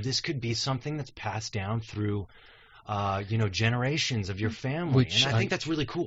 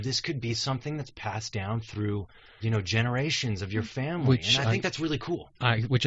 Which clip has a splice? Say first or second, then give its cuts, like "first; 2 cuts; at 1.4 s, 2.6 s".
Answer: second; 1 cut; at 2.6 s